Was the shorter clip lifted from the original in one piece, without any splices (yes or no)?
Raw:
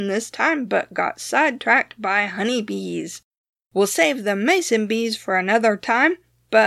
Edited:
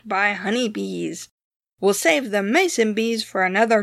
yes